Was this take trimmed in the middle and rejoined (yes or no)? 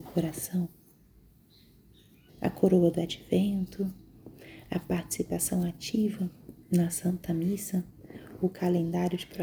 yes